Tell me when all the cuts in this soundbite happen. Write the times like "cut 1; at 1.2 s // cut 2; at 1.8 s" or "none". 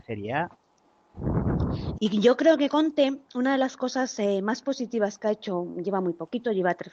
cut 1; at 2.0 s